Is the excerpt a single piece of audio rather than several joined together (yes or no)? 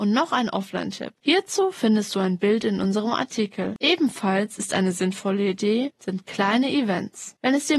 no